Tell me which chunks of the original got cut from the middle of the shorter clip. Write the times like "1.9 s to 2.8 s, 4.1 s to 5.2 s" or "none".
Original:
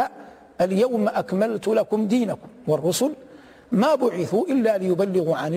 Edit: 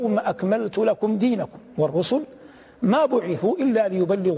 none